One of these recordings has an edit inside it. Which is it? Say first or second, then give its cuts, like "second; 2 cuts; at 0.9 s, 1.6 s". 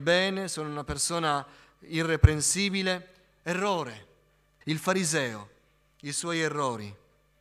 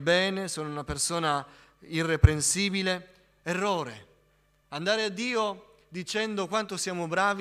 first; 1 cut; at 4.6 s